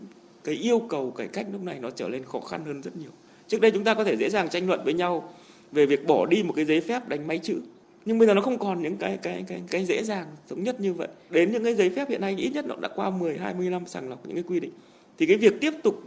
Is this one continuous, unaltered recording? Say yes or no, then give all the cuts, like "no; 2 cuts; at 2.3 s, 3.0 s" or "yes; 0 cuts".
no; 1 cut; at 9.7 s